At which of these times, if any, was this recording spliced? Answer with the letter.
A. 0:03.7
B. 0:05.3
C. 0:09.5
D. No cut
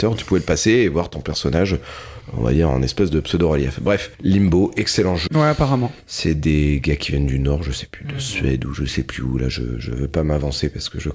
B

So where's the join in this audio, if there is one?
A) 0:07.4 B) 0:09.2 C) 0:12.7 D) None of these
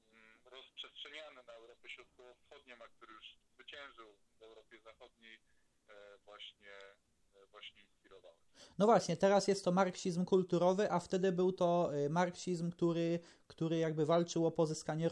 D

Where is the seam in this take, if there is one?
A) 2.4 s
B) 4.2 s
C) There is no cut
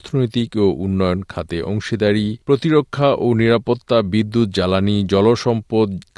A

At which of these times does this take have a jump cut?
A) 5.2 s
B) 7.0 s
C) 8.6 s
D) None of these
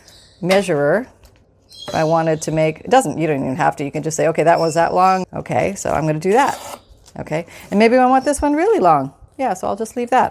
A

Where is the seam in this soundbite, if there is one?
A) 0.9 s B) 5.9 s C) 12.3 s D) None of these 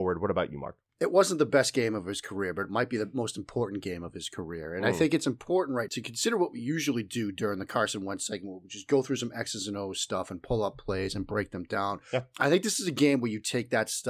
B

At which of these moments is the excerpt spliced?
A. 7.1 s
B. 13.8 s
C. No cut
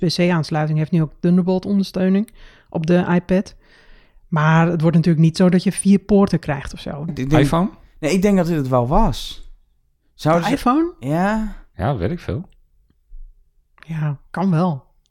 A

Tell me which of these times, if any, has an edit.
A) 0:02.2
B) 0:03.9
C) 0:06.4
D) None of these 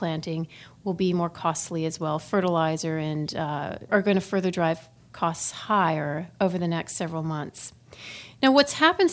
B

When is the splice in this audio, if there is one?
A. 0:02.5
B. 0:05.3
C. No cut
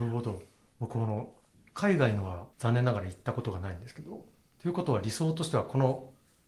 A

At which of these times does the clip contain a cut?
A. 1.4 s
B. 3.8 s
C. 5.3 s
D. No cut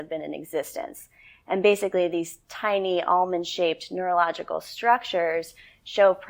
D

